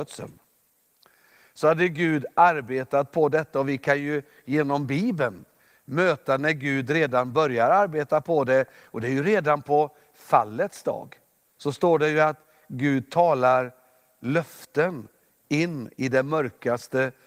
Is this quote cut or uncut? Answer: cut